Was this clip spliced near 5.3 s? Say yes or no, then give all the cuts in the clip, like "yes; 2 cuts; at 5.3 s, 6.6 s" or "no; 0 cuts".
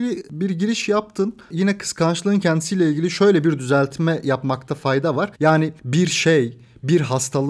yes; 1 cut; at 5.3 s